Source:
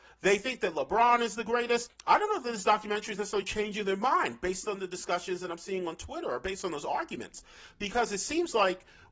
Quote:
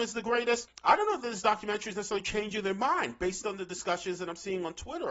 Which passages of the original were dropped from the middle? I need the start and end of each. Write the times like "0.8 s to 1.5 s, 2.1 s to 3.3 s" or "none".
none